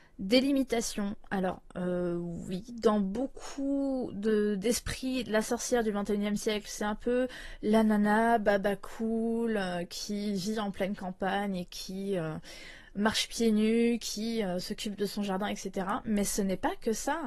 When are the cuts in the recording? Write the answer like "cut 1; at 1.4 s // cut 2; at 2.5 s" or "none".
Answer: none